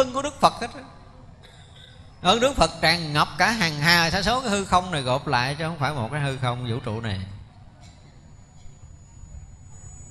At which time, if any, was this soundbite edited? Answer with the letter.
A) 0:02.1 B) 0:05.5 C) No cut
A